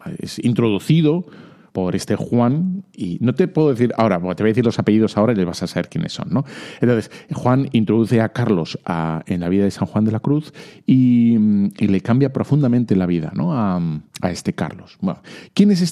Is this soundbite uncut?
yes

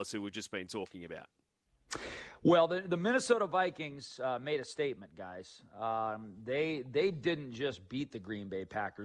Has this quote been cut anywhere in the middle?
no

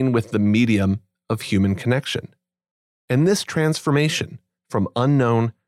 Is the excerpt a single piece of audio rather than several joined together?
no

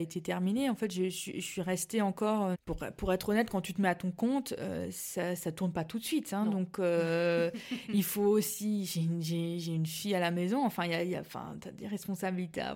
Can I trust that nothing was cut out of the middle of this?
no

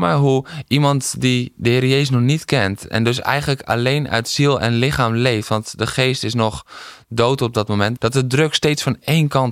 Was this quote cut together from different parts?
yes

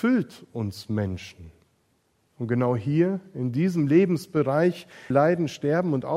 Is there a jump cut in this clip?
yes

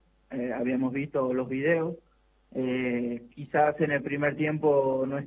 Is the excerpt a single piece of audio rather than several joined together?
yes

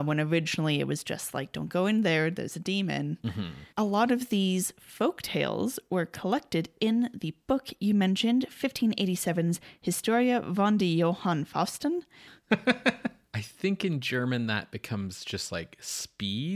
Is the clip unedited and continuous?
no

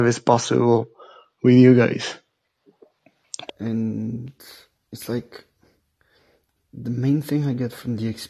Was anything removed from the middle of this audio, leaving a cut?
yes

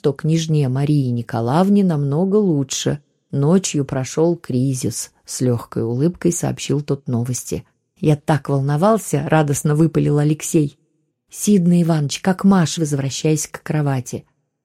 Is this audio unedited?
no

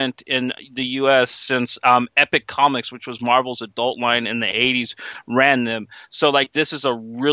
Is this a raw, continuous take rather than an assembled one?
yes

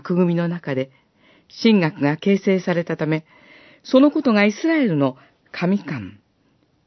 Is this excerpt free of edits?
yes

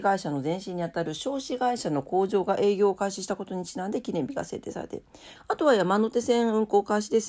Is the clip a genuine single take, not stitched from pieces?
no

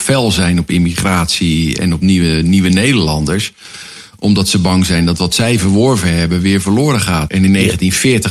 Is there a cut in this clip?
yes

